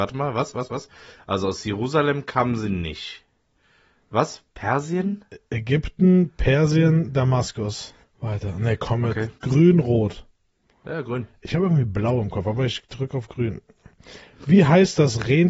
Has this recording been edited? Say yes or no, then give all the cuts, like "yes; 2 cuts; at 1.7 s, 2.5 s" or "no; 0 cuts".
yes; 2 cuts; at 8.0 s, 9.4 s